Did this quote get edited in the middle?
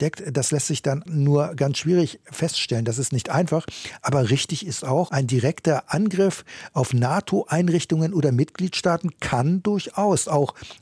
yes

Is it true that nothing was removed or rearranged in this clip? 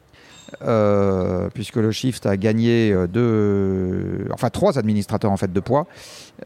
yes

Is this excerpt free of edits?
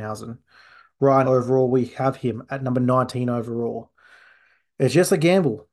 no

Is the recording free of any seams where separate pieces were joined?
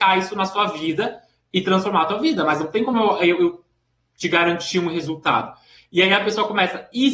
yes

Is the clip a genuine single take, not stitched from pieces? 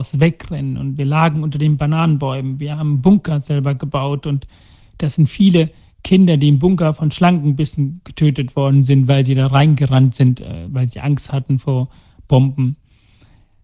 yes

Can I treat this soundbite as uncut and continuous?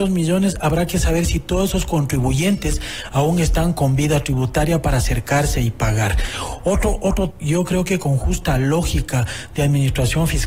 no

